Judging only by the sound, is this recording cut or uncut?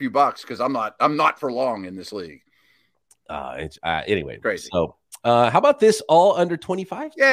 uncut